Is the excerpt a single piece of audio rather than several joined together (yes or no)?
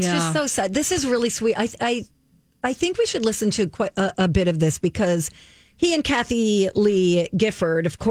yes